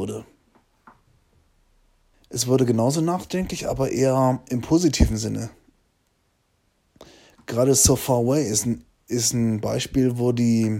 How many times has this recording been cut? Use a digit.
1